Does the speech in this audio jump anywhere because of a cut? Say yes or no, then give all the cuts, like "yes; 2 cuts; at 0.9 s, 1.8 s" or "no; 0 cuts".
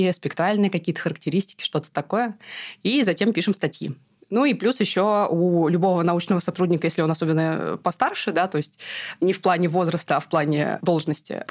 no; 0 cuts